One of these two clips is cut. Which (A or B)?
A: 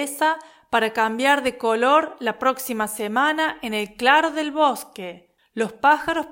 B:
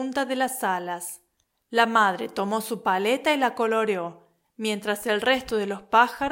A